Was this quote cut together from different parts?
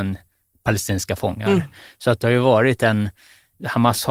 no; 0 cuts

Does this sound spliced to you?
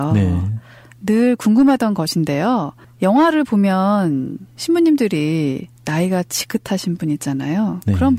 no; 0 cuts

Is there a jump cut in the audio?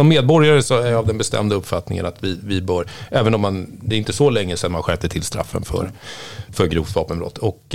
no; 0 cuts

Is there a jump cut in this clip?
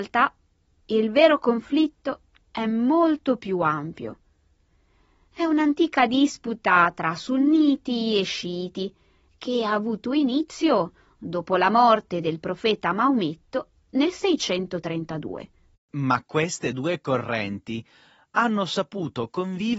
yes; 1 cut; at 15.8 s

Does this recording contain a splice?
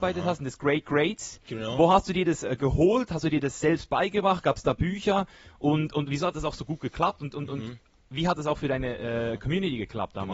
no; 0 cuts

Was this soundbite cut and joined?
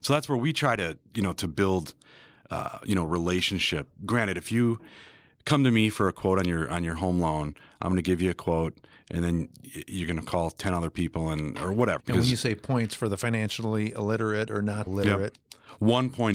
yes; 2 cuts; at 12.0 s, 14.9 s

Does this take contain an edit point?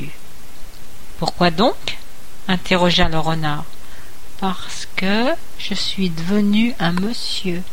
no; 0 cuts

